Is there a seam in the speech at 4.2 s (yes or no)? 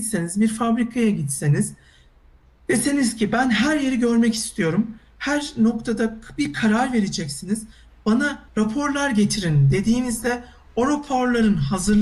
no